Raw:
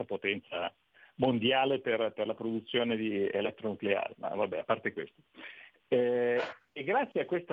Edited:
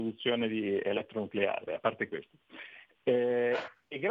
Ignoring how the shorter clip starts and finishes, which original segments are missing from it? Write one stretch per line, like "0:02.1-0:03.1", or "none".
0:04.1-0:04.5